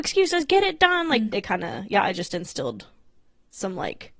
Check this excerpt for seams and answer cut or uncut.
cut